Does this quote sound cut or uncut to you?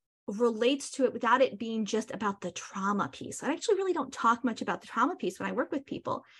uncut